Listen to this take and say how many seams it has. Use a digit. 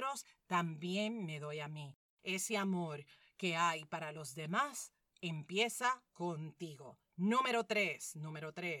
1